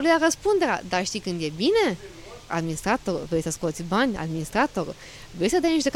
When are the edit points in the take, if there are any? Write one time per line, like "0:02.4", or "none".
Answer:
0:02.5